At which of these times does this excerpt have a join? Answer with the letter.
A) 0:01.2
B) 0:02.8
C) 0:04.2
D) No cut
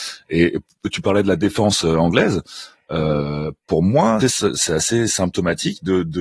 C